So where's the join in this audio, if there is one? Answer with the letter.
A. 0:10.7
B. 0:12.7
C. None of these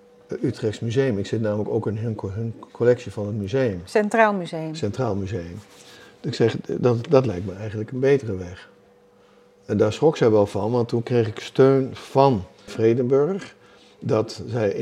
B